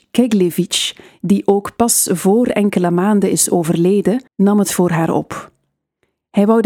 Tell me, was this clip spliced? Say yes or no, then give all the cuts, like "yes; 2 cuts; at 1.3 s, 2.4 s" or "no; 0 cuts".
yes; 1 cut; at 4.3 s